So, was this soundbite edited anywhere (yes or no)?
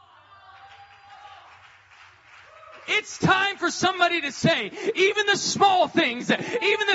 no